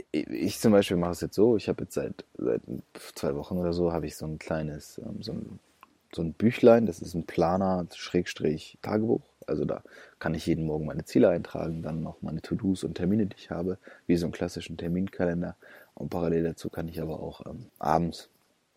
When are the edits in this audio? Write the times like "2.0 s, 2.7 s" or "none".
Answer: 17.7 s